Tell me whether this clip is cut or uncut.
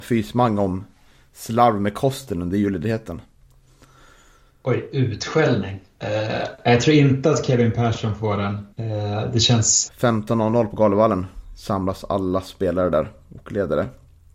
cut